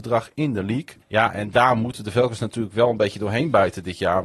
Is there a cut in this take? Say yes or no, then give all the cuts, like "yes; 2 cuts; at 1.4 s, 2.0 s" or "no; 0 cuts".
yes; 1 cut; at 1.0 s